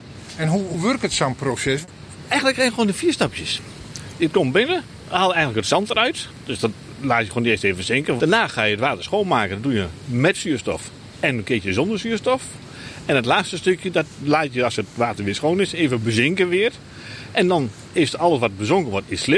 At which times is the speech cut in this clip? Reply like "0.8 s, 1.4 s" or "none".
8.2 s